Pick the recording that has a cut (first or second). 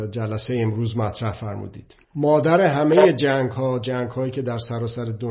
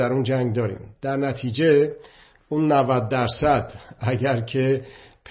first